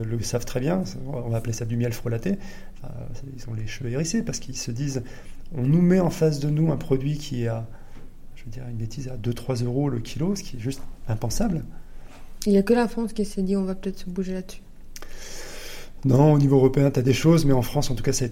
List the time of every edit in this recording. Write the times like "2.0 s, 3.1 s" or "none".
12.4 s